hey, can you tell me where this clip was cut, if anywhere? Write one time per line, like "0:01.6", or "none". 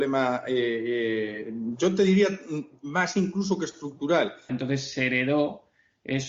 0:04.5